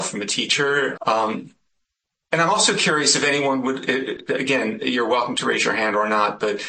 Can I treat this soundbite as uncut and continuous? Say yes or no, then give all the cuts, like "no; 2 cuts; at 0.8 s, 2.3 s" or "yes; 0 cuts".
no; 1 cut; at 1.0 s